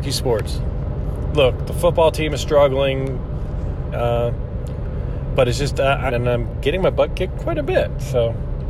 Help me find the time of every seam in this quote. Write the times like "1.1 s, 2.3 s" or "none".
3.9 s, 6.1 s